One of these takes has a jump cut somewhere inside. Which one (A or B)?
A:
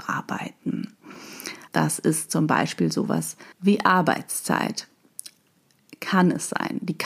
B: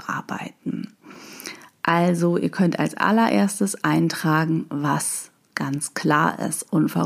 A